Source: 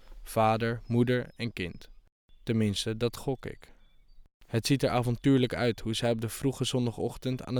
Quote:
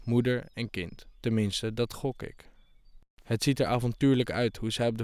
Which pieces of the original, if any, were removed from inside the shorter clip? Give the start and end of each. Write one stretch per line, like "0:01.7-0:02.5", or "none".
0:02.0-0:02.4